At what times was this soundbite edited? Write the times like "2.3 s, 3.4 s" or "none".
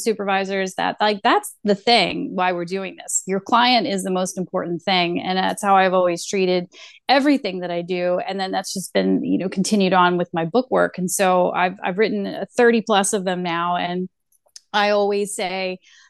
none